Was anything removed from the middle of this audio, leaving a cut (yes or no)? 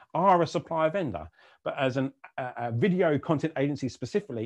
no